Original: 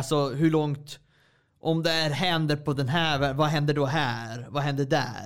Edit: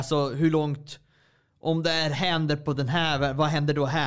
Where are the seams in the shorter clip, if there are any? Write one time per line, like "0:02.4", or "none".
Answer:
none